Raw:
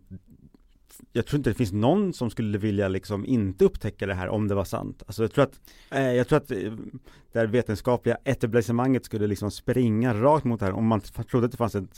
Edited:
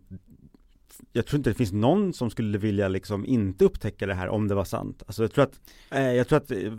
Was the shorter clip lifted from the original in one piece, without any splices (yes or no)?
yes